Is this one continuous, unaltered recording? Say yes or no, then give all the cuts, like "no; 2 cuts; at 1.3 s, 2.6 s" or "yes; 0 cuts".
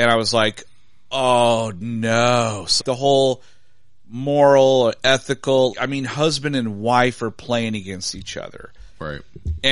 no; 2 cuts; at 2.8 s, 5.7 s